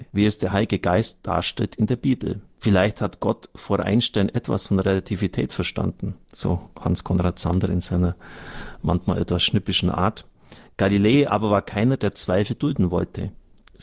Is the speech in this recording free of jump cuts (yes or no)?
yes